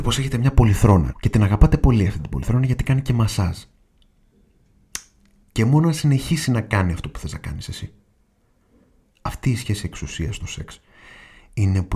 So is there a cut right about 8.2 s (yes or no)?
no